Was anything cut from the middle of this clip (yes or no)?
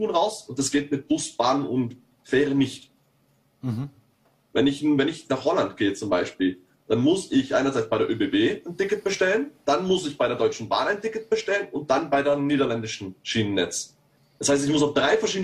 no